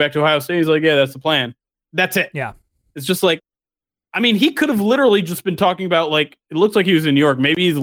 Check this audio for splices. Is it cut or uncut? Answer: uncut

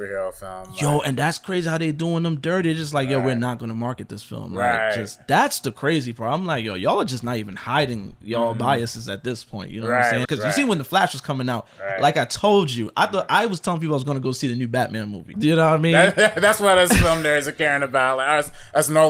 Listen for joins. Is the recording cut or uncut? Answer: cut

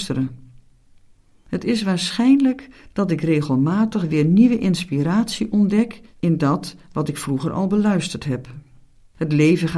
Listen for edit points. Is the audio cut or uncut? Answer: uncut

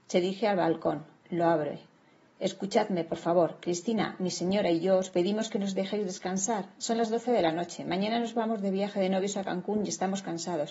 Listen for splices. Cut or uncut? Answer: uncut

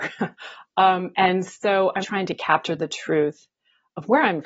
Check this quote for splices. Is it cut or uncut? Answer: cut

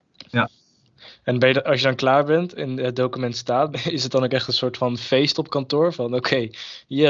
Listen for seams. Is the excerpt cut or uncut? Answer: cut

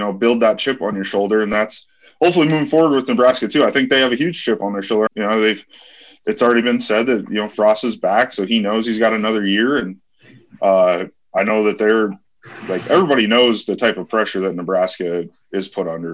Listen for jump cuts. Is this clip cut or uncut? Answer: cut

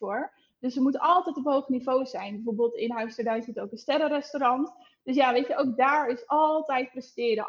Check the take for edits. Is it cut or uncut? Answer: uncut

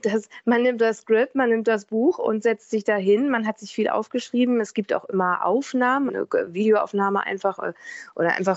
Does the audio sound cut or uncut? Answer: cut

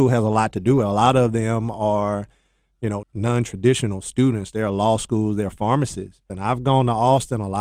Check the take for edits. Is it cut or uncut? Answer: cut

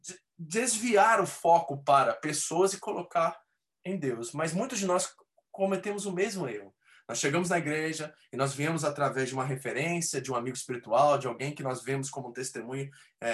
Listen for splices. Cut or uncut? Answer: uncut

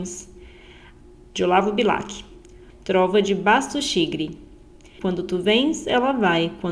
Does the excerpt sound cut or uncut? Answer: cut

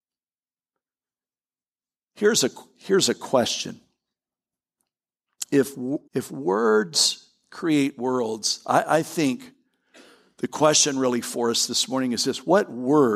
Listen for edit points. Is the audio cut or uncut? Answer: cut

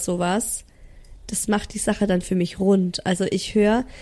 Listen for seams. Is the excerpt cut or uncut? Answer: uncut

